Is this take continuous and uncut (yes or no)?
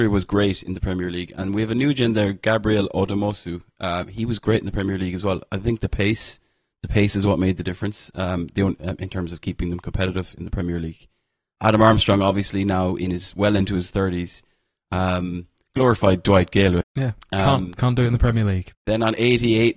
no